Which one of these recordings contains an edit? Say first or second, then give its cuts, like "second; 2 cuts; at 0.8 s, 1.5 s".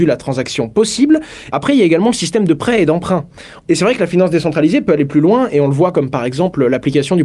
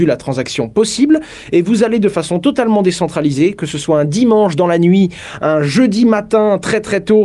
first; 2 cuts; at 1.5 s, 3.6 s